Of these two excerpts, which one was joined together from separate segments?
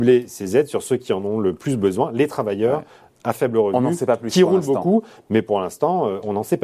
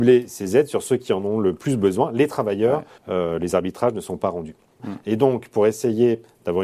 second; 2 cuts; at 3.0 s, 4.8 s

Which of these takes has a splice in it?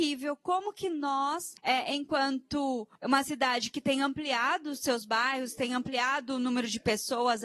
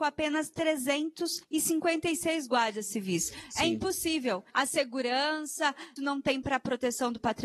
second; 2 cuts; at 4.5 s, 6.0 s

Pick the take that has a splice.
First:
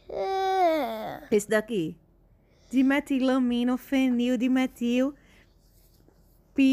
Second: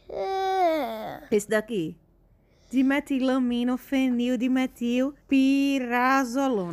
second; 1 cut; at 5.2 s

